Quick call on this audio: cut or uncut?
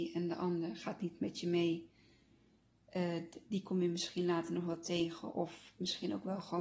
uncut